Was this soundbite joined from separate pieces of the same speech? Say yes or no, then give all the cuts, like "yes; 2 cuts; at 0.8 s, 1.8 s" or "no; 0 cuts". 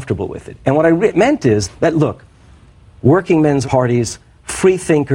yes; 1 cut; at 1.7 s